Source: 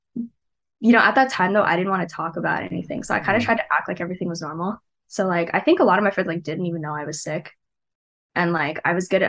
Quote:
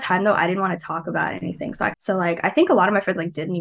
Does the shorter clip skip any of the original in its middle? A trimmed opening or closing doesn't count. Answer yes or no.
yes